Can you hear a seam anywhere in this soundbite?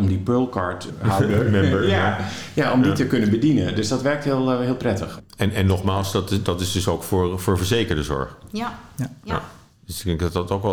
no; 0 cuts

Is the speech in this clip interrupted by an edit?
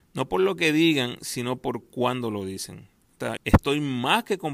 yes; 1 cut; at 3.4 s

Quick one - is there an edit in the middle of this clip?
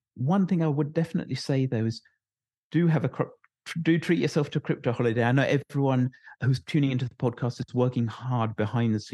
no; 0 cuts

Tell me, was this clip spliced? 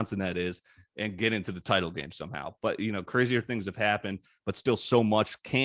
no; 0 cuts

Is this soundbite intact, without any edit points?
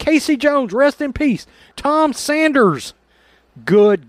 no; 1 cut; at 1.7 s

